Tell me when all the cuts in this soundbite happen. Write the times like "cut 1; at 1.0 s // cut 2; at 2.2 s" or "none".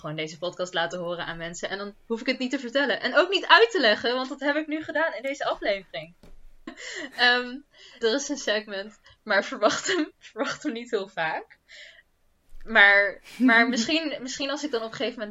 cut 1; at 6.7 s // cut 2; at 8.0 s